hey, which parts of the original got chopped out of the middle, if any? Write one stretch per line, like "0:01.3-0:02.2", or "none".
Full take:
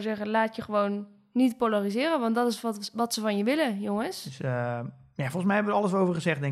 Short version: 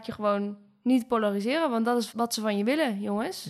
0:02.6-0:02.9